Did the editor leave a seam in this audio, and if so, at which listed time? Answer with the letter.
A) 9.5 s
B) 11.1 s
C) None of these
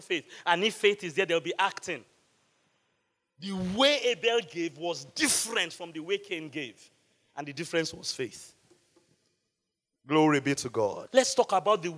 B